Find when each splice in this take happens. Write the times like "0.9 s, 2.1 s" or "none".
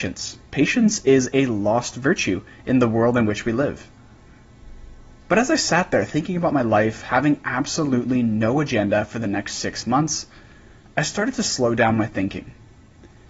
none